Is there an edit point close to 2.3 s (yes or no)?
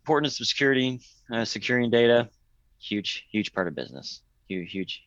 no